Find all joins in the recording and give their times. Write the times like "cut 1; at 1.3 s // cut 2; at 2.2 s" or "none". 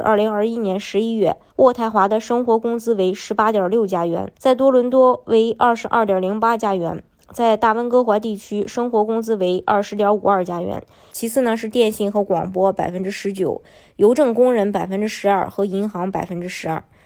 cut 1; at 1.5 s // cut 2; at 4.3 s // cut 3; at 11.1 s